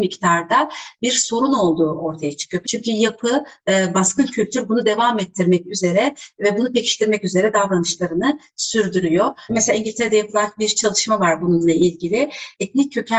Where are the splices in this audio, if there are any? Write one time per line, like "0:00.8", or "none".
0:02.6
0:09.5